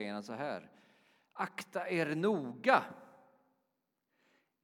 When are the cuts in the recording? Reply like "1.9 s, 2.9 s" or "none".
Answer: none